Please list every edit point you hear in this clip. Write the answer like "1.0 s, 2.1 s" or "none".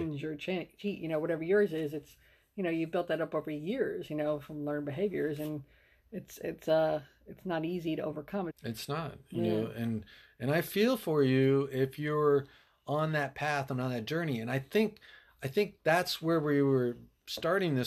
8.5 s